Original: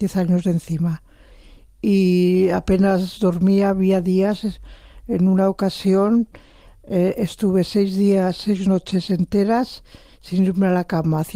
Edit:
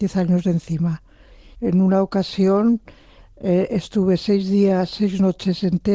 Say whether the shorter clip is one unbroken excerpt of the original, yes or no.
no